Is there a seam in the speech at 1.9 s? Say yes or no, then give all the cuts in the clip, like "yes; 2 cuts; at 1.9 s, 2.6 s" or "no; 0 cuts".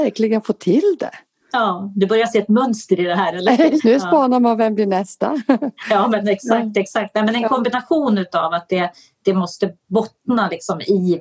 no; 1 cut; at 3.8 s